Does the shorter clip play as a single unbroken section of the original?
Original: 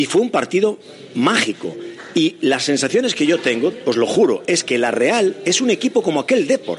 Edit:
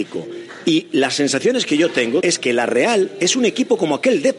no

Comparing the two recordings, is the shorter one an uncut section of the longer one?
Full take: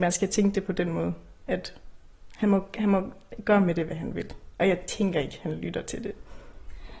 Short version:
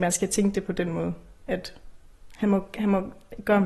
yes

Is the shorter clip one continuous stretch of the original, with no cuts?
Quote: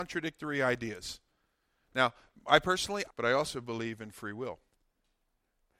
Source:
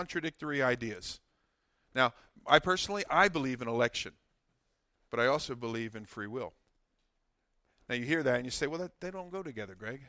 no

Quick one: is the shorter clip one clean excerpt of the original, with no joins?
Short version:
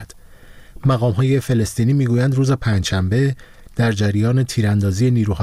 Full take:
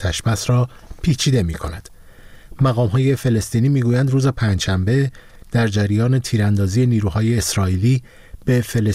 yes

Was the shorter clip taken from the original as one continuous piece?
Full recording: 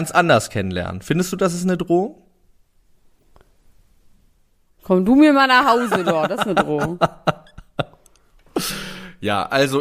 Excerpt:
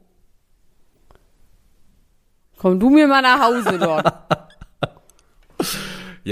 no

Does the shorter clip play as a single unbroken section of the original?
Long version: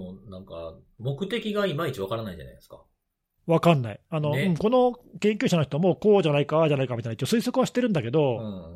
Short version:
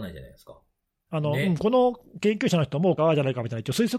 no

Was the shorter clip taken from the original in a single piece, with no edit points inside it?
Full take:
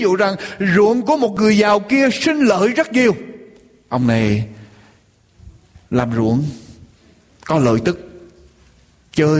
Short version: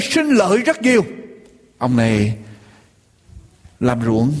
yes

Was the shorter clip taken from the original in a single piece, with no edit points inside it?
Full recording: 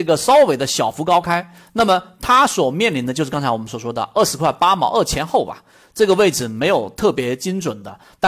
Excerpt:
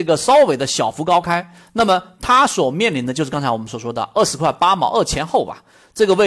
yes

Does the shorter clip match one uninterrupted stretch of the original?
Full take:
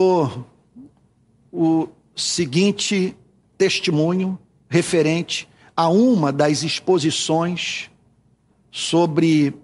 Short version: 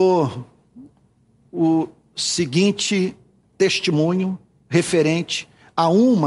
yes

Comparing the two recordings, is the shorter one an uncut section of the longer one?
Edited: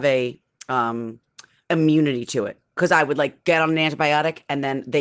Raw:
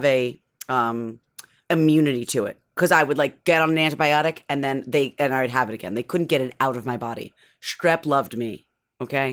yes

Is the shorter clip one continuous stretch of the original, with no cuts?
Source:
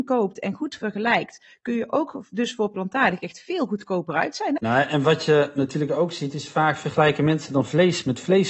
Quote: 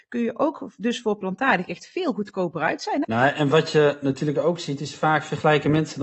yes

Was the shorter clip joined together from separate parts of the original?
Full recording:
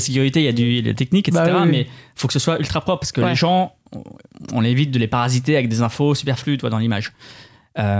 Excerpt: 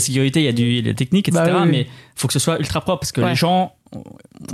no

